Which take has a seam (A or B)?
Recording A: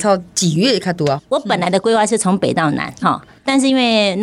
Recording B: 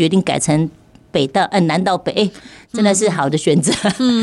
A